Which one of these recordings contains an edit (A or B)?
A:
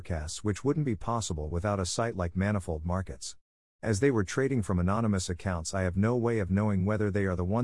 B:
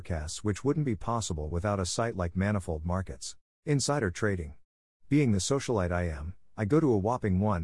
B